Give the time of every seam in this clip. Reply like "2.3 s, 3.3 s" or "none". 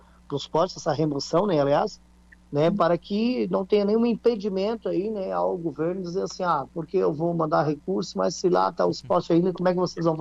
none